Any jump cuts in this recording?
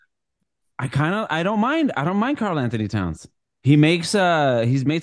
no; 0 cuts

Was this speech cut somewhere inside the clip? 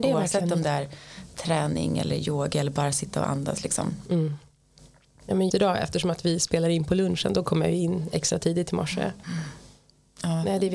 yes; 2 cuts; at 5.5 s, 9.2 s

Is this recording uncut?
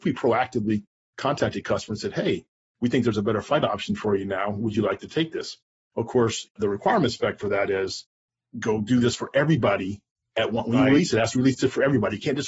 no; 1 cut; at 6.5 s

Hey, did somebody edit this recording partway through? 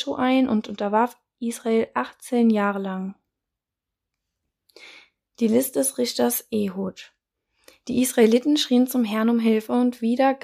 no; 0 cuts

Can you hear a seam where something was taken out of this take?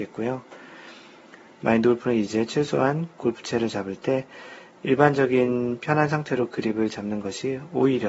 yes; 1 cut; at 1.5 s

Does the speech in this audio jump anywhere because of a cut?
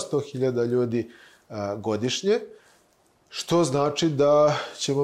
no; 0 cuts

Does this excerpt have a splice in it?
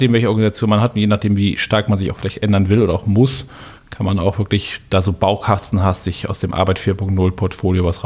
no; 0 cuts

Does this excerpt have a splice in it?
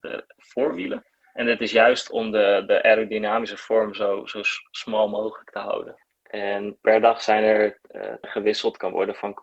yes; 2 cuts; at 6.1 s, 8.2 s

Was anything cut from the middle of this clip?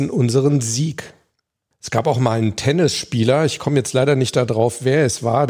no; 0 cuts

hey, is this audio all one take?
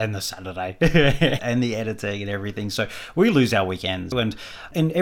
no; 2 cuts; at 1.4 s, 4.1 s

